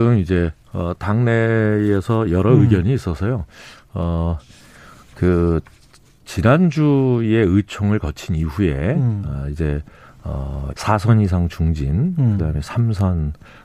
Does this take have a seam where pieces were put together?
yes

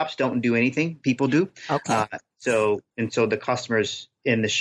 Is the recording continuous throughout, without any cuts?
yes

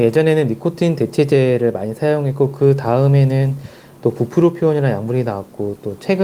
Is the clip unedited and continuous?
yes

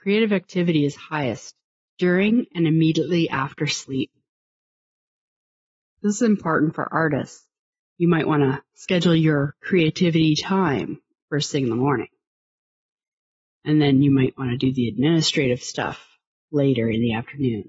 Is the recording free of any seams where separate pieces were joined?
no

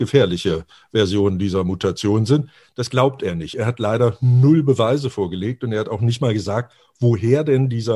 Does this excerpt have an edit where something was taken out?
no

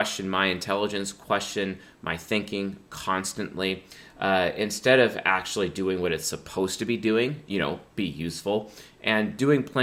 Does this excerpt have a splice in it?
no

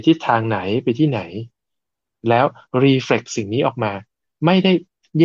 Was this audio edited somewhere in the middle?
no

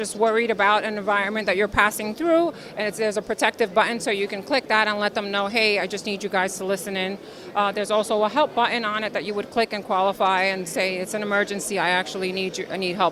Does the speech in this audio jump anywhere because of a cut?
no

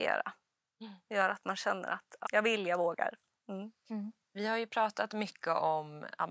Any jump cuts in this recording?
yes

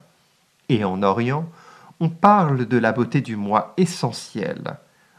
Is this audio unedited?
yes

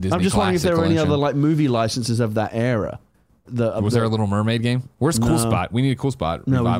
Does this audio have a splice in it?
yes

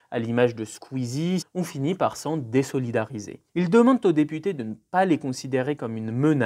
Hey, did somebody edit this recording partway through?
yes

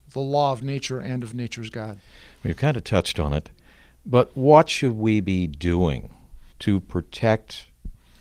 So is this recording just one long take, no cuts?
yes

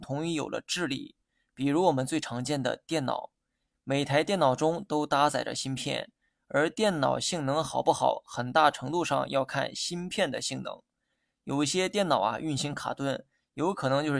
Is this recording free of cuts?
yes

